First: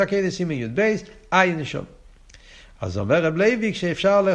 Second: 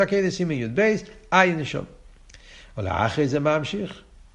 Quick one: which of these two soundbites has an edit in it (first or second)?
first